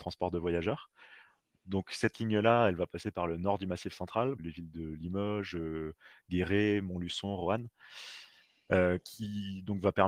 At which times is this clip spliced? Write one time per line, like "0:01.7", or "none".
0:04.4